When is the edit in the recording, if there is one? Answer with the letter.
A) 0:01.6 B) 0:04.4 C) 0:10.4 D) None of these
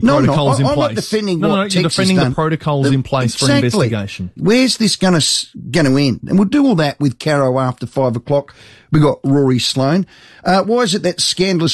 B